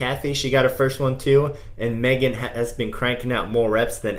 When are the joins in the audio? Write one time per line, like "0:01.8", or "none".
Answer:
none

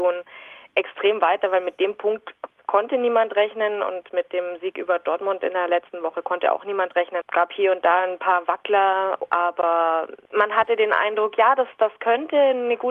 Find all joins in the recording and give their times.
0:07.2

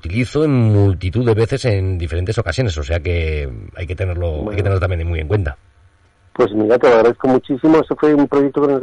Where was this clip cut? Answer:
none

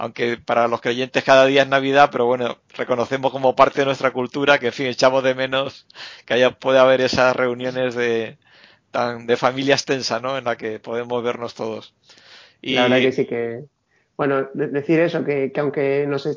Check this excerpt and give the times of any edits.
none

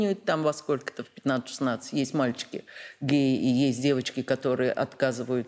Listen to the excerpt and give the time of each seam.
none

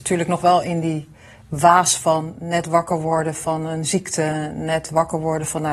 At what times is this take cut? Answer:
none

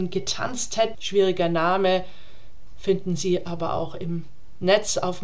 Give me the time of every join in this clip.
0:00.9

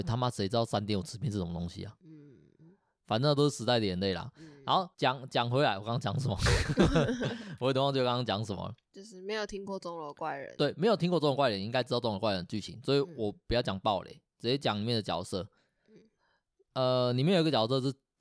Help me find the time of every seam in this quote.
0:04.9

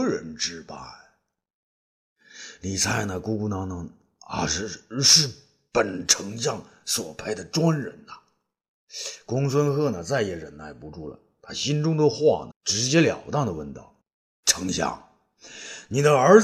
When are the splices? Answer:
0:12.5
0:14.0

